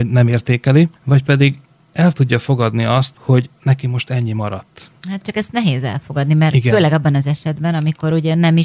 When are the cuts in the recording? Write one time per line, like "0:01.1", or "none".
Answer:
0:03.1